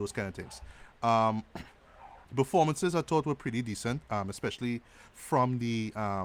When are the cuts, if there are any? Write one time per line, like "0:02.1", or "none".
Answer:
0:02.2